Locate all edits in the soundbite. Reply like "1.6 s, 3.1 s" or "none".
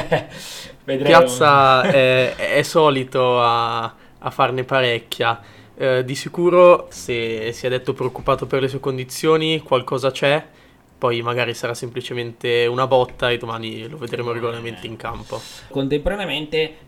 6.9 s, 15.7 s